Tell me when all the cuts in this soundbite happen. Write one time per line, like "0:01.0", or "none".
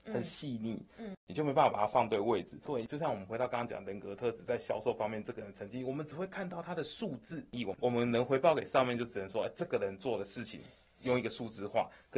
0:01.1
0:02.7
0:07.8